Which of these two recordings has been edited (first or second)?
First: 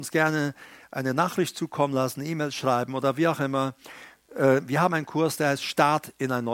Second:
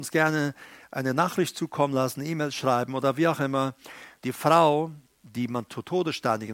second